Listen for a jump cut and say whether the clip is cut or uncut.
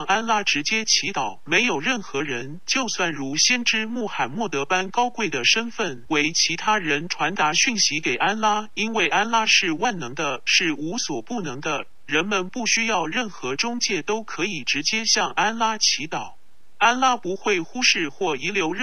cut